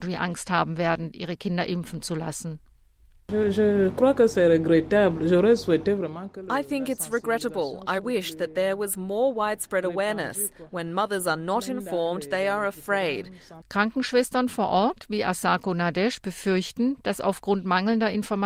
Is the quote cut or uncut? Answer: cut